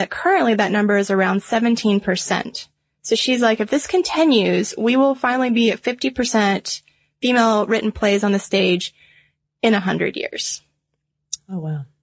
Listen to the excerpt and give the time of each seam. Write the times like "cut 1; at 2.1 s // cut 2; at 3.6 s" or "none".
none